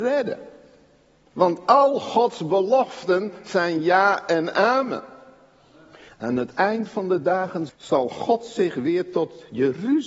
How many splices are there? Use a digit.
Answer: 3